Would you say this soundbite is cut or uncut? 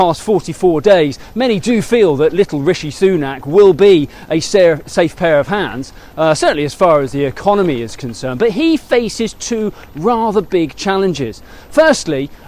uncut